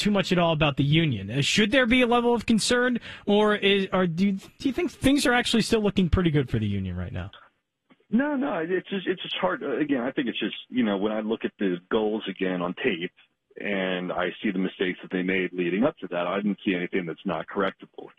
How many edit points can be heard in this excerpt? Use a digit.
0